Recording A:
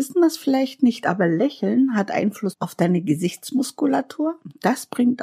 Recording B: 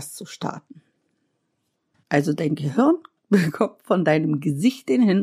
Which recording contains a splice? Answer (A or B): B